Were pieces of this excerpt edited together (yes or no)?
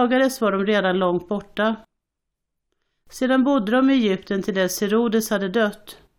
no